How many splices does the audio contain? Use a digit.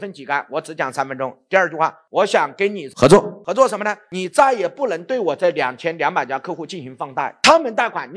0